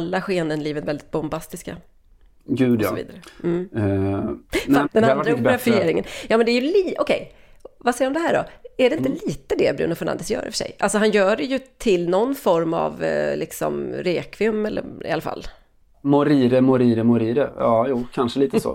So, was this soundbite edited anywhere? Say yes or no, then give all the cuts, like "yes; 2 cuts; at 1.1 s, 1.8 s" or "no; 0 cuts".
yes; 1 cut; at 4.8 s